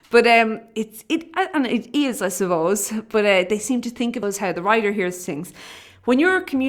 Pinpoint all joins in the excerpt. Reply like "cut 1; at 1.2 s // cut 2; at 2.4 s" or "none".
cut 1; at 4.2 s